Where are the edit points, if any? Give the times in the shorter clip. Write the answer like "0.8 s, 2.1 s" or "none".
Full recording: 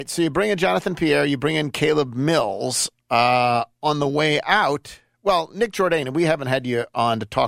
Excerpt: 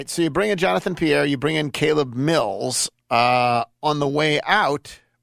none